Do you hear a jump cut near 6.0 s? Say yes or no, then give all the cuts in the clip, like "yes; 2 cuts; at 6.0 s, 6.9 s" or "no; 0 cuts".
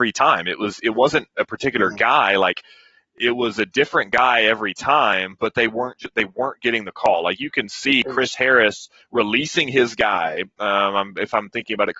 no; 0 cuts